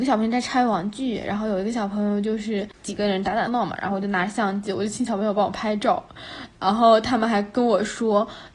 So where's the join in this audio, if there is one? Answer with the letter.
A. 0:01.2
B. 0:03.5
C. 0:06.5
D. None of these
B